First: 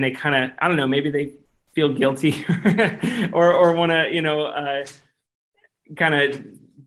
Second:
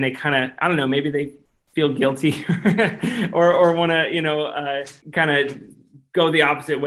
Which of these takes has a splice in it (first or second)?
second